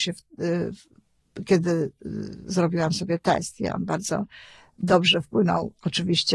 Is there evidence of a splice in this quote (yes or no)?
no